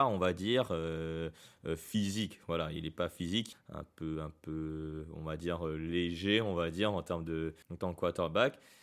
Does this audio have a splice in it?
yes; 2 cuts; at 3.5 s, 7.6 s

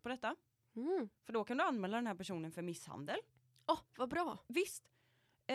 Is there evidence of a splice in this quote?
no; 0 cuts

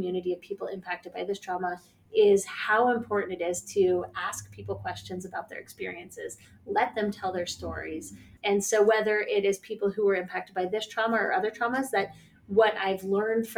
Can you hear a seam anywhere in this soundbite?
yes; 1 cut; at 8.4 s

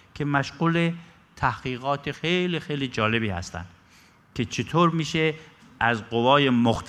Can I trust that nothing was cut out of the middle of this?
yes; 0 cuts

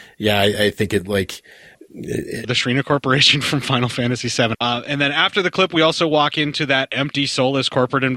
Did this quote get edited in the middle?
yes; 2 cuts; at 2.4 s, 4.5 s

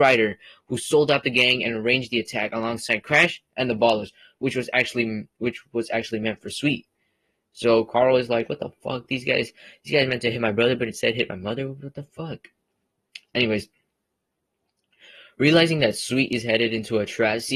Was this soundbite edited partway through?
no; 0 cuts

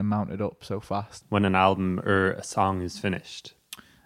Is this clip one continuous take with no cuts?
no; 1 cut; at 1.2 s

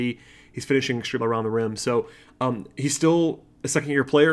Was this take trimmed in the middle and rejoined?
yes; 1 cut; at 1.2 s

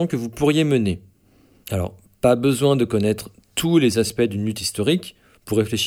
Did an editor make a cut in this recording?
yes; 1 cut; at 1.6 s

